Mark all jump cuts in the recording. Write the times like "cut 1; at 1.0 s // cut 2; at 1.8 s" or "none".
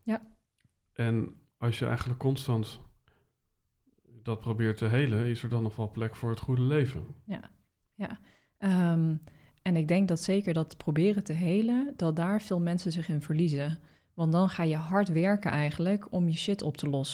none